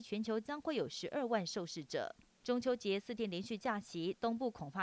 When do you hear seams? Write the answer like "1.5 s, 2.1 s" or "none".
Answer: 2.4 s